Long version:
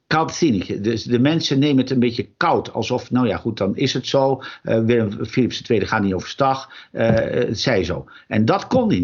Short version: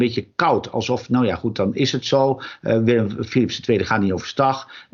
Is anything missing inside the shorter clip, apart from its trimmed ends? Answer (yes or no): no